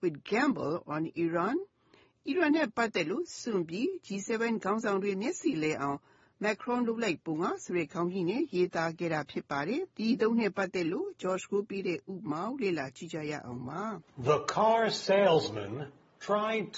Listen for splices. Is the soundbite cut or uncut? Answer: cut